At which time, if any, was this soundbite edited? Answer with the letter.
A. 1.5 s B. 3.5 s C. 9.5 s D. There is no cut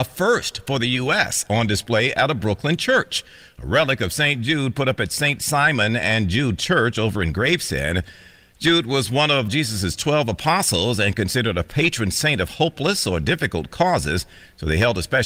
C